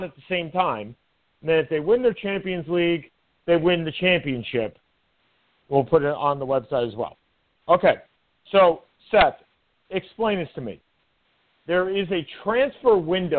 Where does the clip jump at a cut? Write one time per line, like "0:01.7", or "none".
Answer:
0:05.6